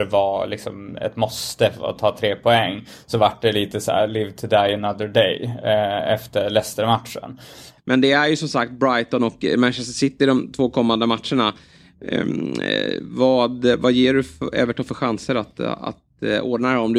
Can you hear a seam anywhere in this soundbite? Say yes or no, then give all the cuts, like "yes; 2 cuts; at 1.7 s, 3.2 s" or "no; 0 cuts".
yes; 1 cut; at 7.8 s